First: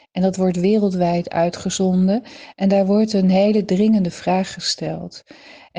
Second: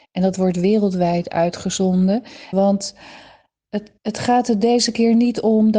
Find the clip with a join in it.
second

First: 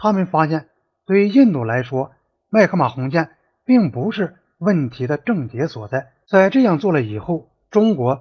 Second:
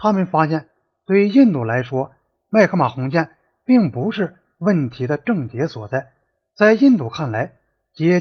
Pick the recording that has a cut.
first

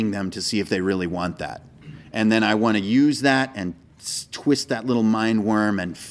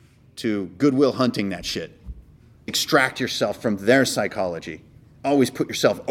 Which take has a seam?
second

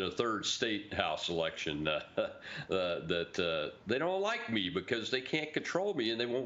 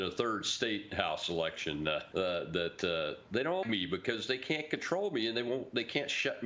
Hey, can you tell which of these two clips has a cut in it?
second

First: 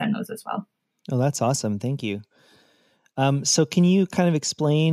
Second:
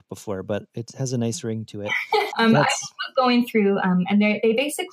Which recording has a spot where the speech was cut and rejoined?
second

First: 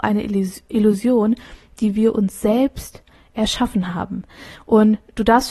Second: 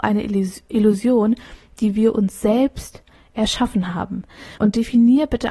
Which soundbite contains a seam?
second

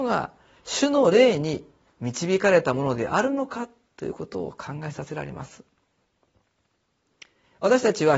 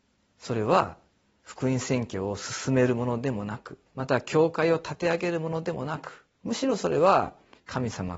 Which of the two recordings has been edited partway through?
second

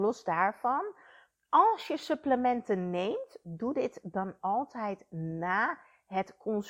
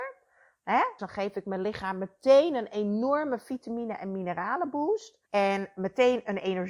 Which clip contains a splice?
second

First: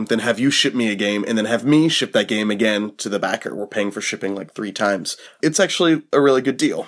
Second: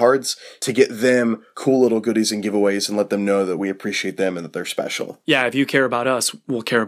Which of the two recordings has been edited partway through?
first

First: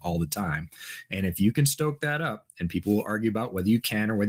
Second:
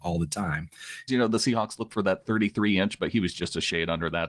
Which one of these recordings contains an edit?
second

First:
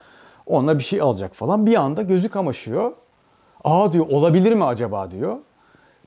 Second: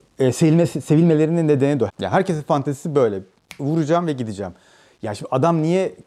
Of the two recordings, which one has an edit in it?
second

